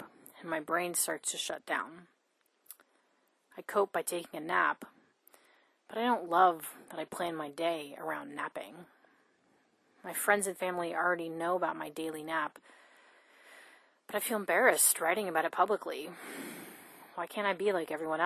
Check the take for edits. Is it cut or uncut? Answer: uncut